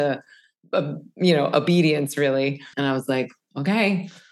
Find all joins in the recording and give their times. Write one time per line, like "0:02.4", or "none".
0:02.7